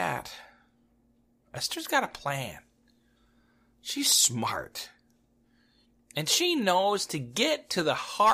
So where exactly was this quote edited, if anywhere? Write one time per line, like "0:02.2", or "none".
none